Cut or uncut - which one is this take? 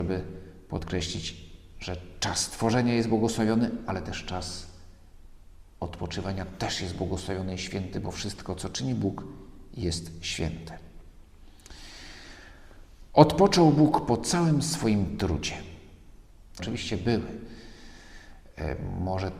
cut